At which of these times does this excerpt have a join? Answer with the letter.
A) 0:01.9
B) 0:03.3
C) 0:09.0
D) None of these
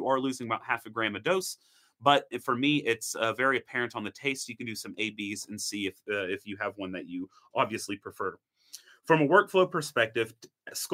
D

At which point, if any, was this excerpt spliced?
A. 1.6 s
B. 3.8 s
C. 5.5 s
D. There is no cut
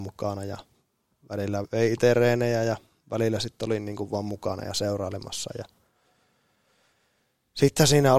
A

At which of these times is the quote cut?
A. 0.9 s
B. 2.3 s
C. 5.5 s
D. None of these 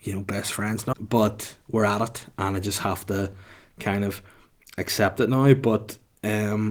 A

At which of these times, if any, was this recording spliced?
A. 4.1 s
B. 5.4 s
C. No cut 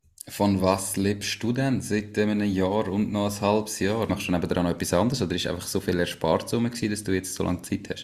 A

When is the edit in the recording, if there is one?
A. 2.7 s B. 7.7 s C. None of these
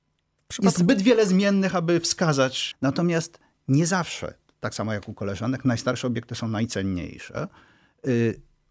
A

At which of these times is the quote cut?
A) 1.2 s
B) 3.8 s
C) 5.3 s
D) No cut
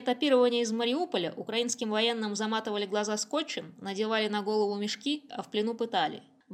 C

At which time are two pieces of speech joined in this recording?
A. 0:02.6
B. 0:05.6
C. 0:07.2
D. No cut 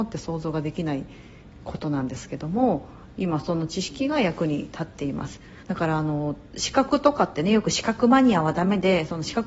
B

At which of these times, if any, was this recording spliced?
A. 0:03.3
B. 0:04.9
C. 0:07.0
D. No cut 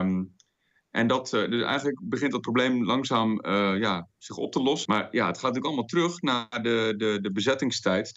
B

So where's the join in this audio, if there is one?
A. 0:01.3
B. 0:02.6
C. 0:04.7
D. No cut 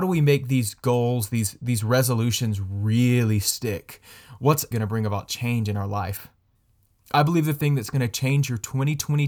C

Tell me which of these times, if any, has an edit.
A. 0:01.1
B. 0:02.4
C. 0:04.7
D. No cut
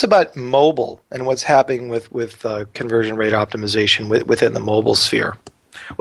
D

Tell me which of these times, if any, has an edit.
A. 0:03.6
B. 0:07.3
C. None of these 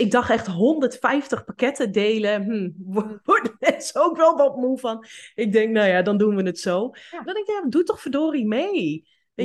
B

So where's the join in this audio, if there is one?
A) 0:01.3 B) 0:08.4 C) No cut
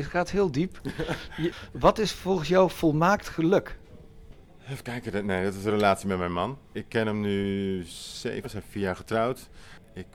B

